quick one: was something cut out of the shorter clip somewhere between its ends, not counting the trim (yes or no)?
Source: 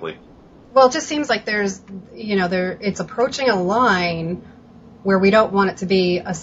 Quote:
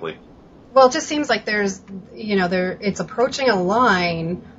no